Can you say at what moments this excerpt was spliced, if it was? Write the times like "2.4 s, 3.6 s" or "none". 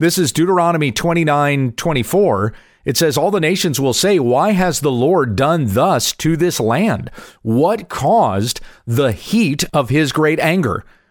none